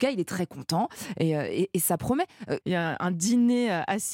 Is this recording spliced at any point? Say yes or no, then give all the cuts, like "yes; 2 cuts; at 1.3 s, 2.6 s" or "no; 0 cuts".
yes; 1 cut; at 2.6 s